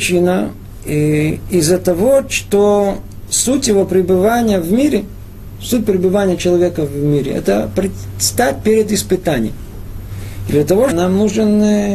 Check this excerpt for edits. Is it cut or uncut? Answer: cut